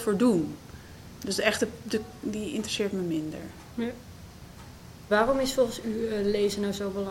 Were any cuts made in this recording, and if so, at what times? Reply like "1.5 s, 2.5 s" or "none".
1.2 s, 2.2 s, 5.1 s